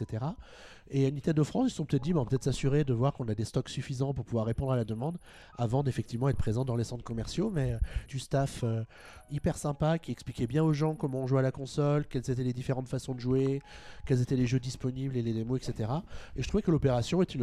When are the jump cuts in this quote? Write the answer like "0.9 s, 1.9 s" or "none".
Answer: 8.1 s